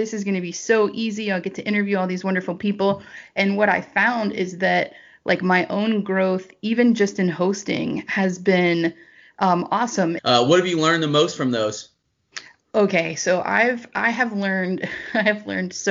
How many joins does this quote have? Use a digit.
1